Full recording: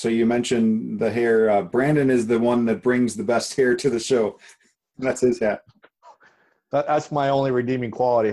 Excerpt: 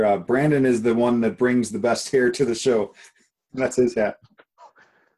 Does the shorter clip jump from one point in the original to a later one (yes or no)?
no